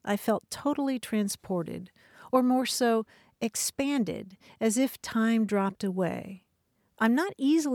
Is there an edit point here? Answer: no; 0 cuts

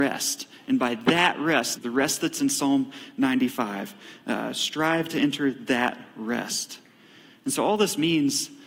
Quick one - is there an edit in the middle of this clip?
yes; 1 cut; at 1.8 s

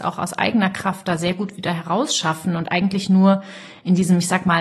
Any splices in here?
no; 0 cuts

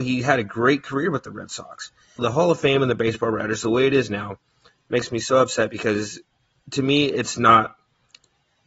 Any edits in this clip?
yes; 1 cut; at 2.2 s

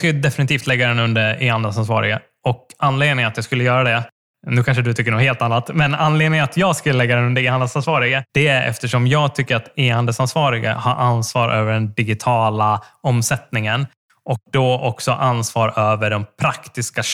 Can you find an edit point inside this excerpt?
yes; 1 cut; at 8.3 s

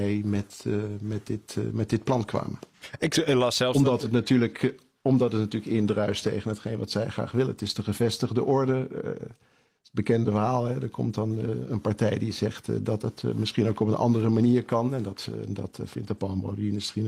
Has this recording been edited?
no; 0 cuts

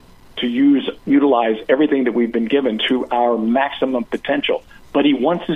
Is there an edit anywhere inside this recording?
no; 0 cuts

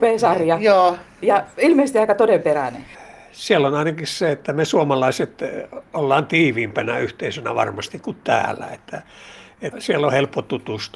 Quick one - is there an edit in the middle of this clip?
yes; 1 cut; at 9.7 s

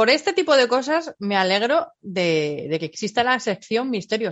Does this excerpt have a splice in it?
no; 0 cuts

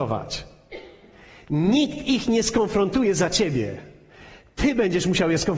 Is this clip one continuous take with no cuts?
yes; 0 cuts

